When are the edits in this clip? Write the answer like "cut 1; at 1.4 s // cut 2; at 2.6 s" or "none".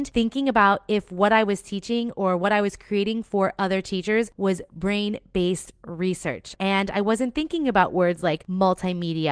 cut 1; at 6.5 s